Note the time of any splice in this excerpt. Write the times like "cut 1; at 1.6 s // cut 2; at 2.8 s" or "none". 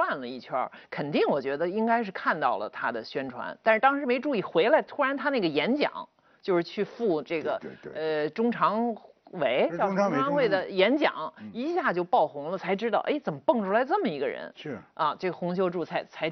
none

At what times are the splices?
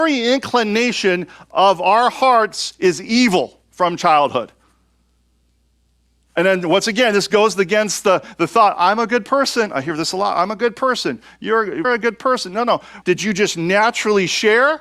cut 1; at 11.8 s // cut 2; at 13.0 s

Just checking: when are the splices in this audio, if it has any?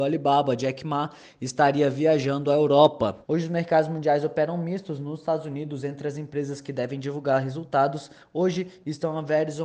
cut 1; at 3.2 s

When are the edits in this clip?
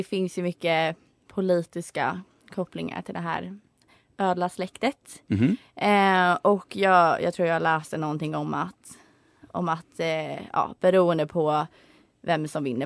none

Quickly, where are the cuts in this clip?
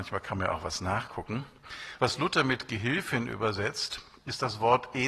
none

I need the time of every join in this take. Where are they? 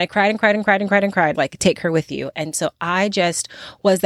cut 1; at 1.3 s

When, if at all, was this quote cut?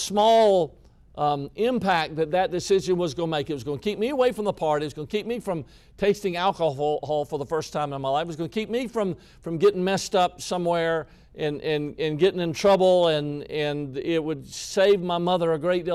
none

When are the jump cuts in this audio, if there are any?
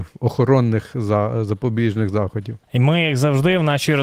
cut 1; at 2.6 s

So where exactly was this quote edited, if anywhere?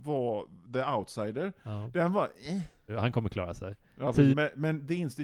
cut 1; at 2.9 s // cut 2; at 4.3 s

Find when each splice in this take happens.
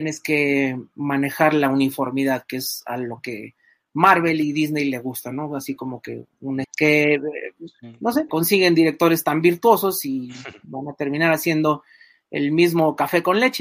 cut 1; at 6.6 s // cut 2; at 8.3 s

